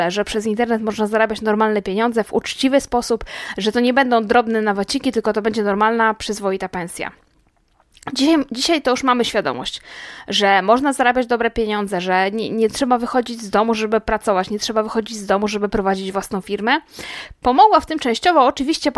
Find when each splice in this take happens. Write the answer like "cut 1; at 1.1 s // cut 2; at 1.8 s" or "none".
none